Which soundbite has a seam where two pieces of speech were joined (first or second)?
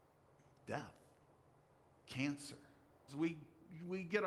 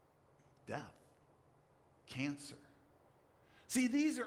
first